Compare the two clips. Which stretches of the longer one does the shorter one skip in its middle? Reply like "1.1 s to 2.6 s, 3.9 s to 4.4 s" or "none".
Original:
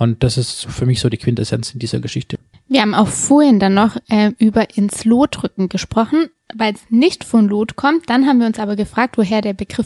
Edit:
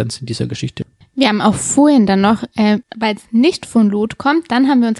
4.4 s to 6.4 s